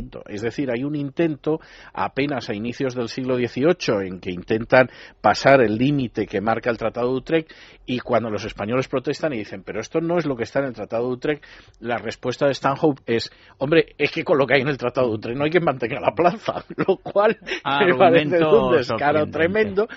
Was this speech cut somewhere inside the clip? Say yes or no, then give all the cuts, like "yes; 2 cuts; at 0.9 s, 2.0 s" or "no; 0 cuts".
no; 0 cuts